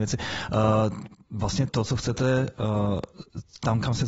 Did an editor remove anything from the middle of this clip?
yes; 1 cut; at 1.7 s

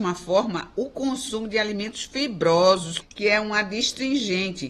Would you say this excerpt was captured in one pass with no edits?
no; 1 cut; at 3.0 s

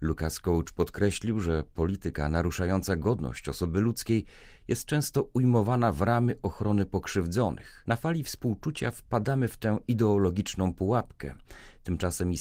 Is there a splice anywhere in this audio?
no; 0 cuts

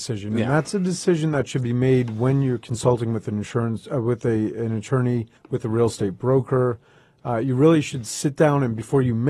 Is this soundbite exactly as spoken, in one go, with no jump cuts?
no; 1 cut; at 5.4 s

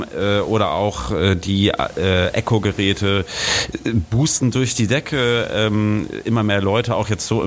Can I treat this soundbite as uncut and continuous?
yes; 0 cuts

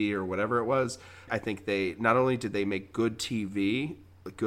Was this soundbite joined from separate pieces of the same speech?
yes; 1 cut; at 1.3 s

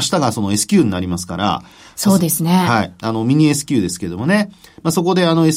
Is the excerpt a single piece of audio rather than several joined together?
yes; 0 cuts

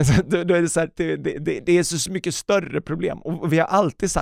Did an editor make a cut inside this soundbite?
no; 0 cuts

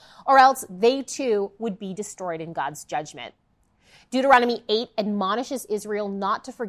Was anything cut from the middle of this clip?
no; 0 cuts

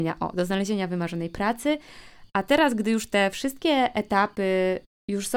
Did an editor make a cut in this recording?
no; 0 cuts

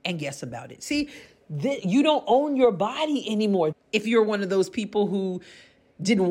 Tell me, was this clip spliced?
yes; 1 cut; at 3.7 s

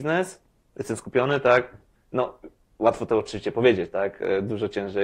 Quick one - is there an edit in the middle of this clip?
no; 0 cuts

